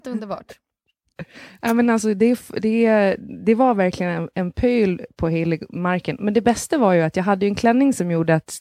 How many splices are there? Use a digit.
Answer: 0